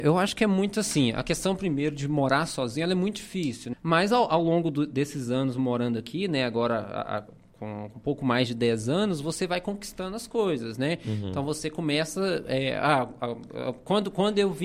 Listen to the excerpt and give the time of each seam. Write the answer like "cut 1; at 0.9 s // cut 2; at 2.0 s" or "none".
cut 1; at 3.7 s